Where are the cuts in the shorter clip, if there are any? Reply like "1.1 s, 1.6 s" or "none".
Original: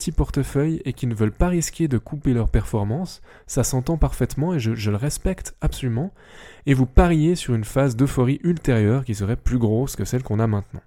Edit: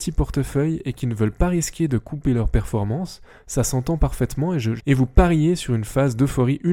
4.8 s